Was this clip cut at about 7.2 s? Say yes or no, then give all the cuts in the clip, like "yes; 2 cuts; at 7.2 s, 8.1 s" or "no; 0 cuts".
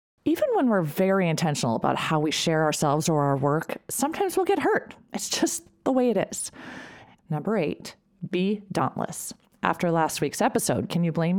yes; 1 cut; at 7.2 s